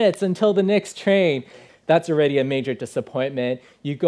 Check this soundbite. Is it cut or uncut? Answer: cut